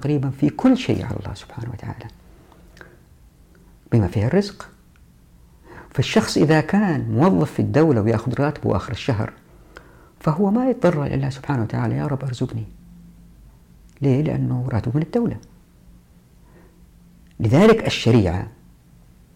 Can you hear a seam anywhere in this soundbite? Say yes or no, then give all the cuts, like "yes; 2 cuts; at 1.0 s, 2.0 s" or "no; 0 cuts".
no; 0 cuts